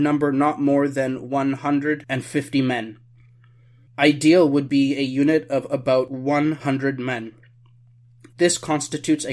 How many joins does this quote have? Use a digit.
1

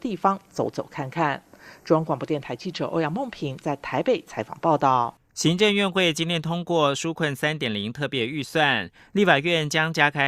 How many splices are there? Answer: 1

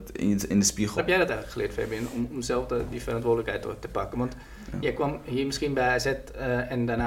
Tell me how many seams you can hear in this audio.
1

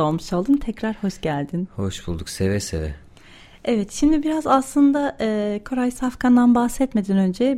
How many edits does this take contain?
0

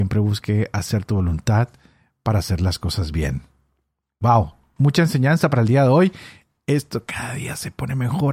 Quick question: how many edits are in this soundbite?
0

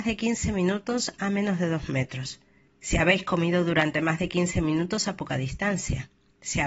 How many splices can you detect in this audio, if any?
1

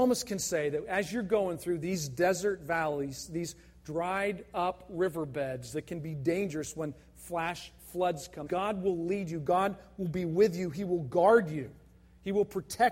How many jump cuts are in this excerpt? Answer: 1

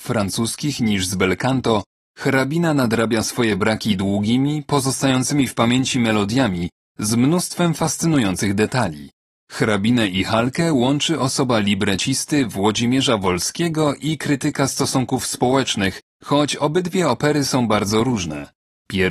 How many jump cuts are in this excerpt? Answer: 1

